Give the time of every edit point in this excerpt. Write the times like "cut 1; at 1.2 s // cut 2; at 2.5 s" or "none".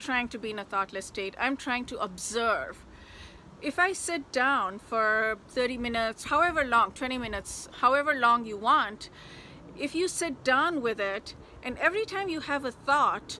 cut 1; at 6.2 s // cut 2; at 7.7 s